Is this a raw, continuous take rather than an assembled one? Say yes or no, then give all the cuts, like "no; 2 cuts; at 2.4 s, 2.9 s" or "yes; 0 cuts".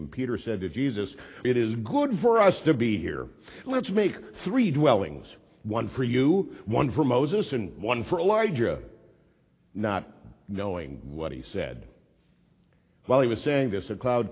no; 1 cut; at 1.4 s